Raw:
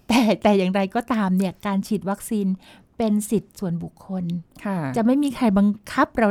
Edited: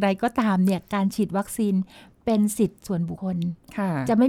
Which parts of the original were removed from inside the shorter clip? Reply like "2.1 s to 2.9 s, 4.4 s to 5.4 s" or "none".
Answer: 3.9 s to 4.1 s